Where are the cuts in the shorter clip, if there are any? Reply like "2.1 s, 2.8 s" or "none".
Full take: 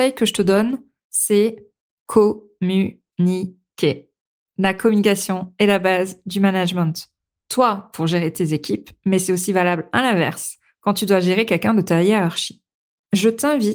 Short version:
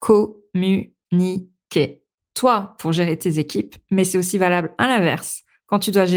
2.2 s